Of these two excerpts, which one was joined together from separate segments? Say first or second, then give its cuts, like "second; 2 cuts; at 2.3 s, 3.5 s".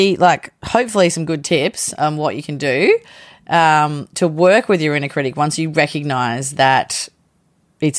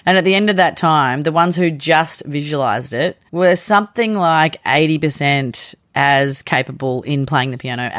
second; 1 cut; at 3.3 s